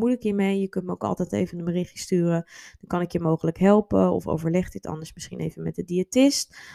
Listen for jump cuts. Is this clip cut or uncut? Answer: uncut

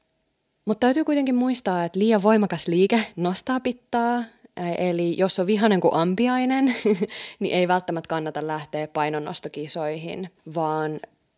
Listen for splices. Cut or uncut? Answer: uncut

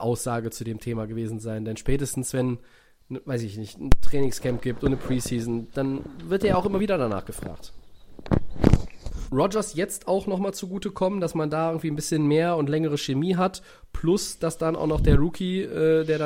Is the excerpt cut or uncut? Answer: cut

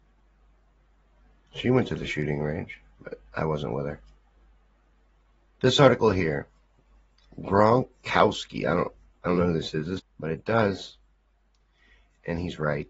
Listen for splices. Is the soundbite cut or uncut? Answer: cut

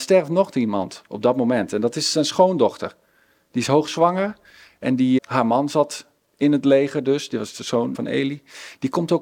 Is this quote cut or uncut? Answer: cut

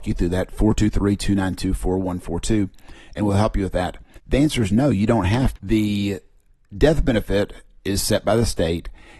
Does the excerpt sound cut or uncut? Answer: cut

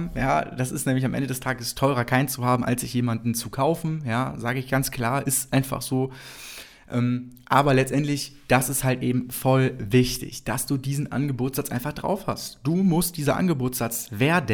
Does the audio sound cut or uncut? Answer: uncut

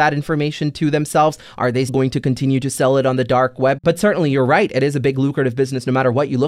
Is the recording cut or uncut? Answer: cut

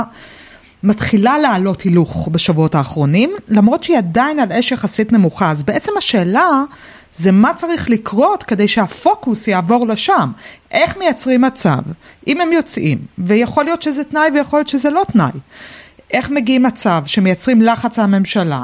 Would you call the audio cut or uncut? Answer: uncut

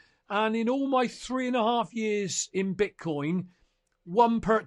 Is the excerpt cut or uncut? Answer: uncut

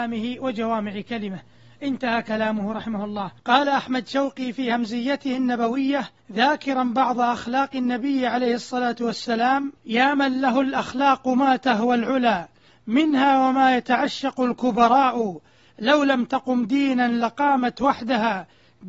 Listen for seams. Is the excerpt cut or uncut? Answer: uncut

